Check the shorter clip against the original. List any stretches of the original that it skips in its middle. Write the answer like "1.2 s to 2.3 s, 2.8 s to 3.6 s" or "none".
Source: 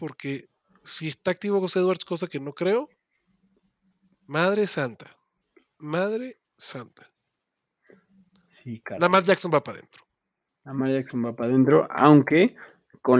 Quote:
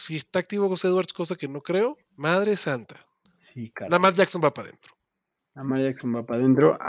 3.0 s to 4.2 s, 5.4 s to 8.3 s